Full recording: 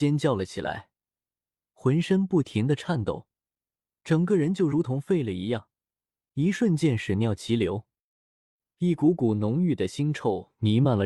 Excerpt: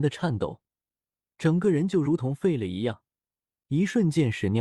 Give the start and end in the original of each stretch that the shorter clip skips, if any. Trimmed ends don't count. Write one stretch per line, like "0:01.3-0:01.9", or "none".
none